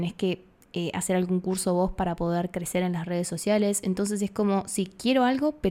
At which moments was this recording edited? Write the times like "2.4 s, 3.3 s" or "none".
none